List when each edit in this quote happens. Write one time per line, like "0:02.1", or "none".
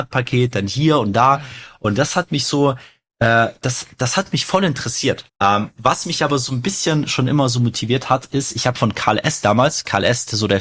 0:05.3